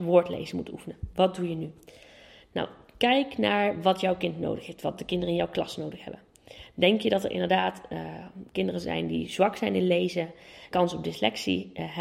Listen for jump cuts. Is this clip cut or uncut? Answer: cut